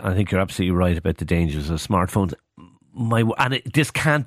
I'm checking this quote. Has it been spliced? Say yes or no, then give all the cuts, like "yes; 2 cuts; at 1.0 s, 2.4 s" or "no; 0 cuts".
no; 0 cuts